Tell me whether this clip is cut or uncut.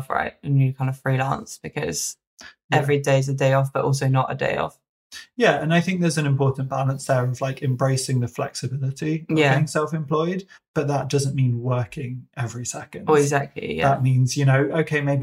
uncut